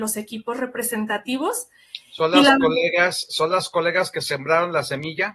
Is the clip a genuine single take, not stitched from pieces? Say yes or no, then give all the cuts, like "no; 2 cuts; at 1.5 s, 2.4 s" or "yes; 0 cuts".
yes; 0 cuts